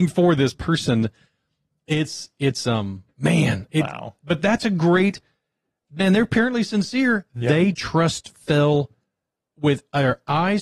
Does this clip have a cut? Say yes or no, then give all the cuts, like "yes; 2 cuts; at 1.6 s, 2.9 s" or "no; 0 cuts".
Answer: yes; 1 cut; at 7.7 s